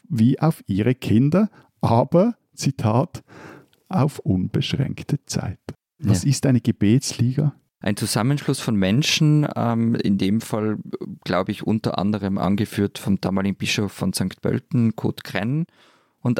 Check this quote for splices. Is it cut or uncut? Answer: cut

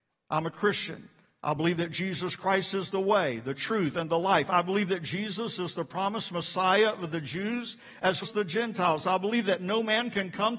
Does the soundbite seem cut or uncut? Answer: cut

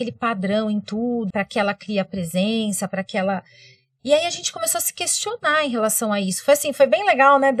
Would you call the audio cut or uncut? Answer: cut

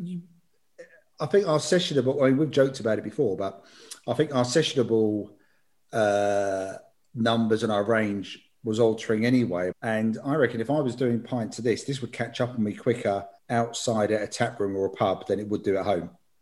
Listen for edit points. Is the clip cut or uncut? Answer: cut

